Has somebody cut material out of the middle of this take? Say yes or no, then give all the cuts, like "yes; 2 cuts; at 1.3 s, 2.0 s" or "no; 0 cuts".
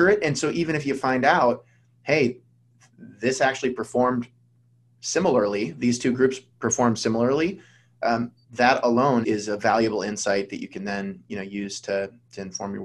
yes; 1 cut; at 9.2 s